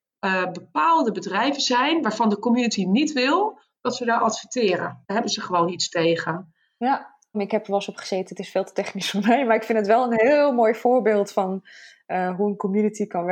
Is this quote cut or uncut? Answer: cut